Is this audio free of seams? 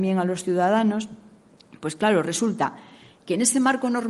yes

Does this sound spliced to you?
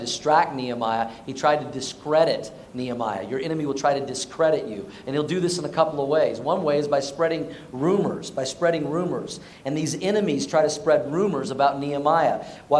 no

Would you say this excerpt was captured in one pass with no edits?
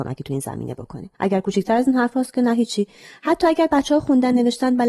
no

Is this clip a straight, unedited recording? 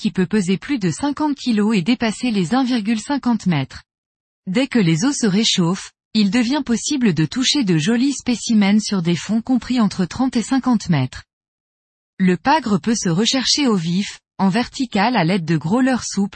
no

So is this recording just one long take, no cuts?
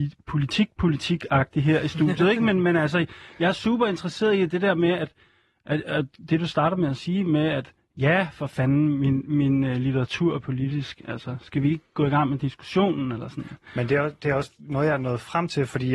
yes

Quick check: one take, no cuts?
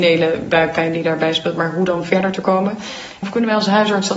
no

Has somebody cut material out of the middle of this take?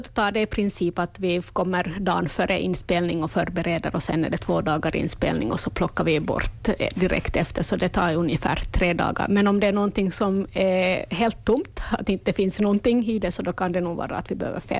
yes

